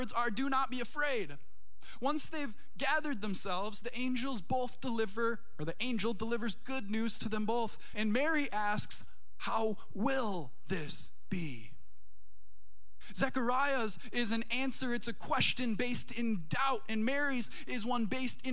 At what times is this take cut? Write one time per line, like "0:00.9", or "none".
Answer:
0:07.9